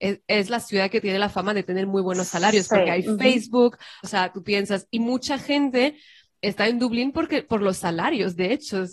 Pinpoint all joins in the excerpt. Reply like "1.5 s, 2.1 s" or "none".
4.0 s